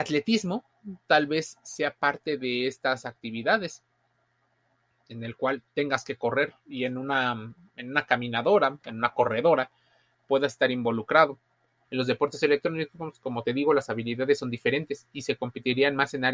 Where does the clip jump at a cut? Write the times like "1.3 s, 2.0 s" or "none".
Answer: 11.8 s

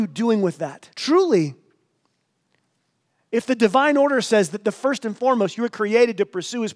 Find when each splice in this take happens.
0.9 s

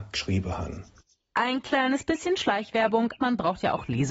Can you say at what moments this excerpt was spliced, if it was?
3.2 s

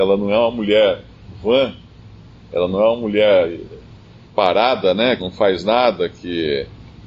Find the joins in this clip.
5.2 s

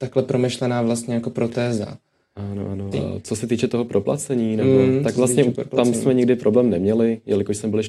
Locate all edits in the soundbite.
2.9 s

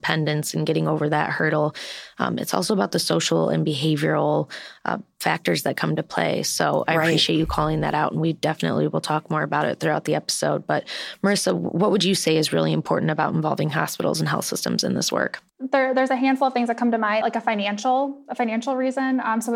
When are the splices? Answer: 15.5 s, 17.2 s

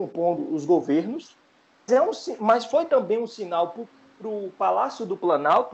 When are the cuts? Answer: 1.9 s

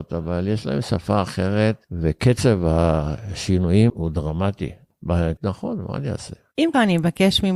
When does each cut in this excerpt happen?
3.9 s, 5.4 s

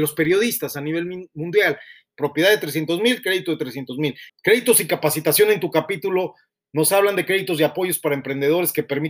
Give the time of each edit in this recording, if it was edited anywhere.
2.1 s, 4.3 s

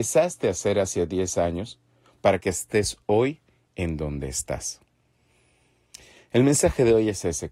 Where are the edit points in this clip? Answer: none

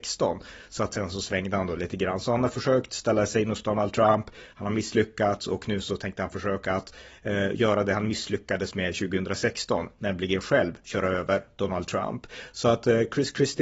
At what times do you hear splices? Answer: none

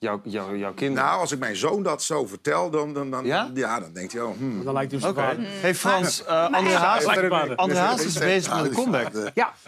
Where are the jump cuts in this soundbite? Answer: 7.2 s

